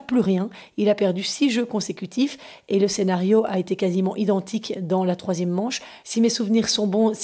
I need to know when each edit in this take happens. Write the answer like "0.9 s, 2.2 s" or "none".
none